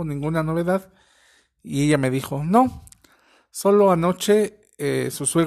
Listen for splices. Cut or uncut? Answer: uncut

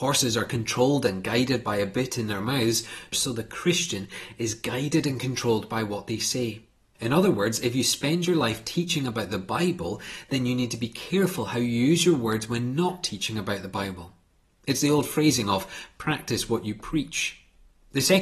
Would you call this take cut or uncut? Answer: cut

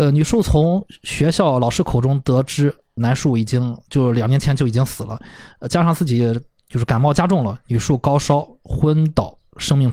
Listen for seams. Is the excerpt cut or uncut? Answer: uncut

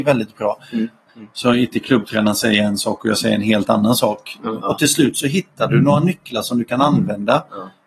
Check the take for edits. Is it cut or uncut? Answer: cut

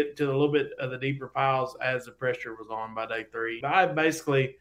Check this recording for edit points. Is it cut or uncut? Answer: cut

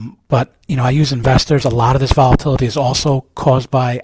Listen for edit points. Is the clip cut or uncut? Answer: uncut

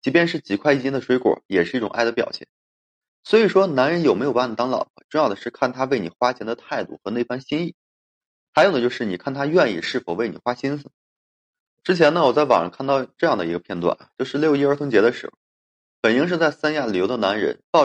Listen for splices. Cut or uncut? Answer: uncut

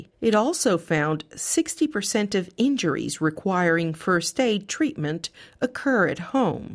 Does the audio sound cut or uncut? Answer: uncut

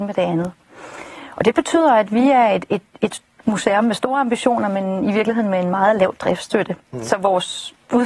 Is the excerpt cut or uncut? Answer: uncut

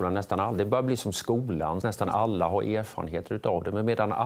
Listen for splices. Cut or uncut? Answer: cut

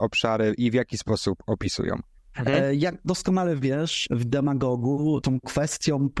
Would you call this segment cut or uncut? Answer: cut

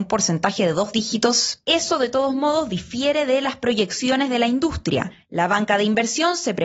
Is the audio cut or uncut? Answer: cut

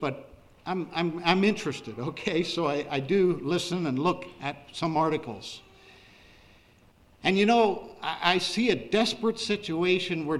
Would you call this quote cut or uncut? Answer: uncut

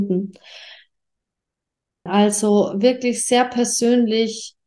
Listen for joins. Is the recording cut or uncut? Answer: cut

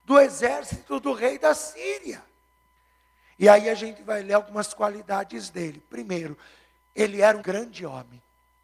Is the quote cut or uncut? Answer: cut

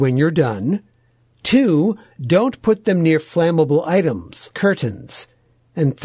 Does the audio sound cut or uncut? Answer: cut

